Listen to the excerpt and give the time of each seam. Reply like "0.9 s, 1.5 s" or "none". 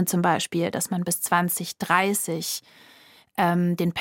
none